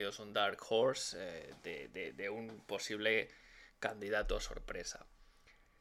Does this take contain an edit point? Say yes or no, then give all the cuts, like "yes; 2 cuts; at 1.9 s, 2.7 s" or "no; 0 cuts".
no; 0 cuts